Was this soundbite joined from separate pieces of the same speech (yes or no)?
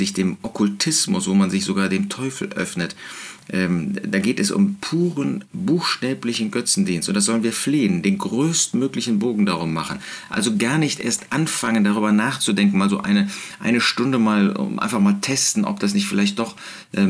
no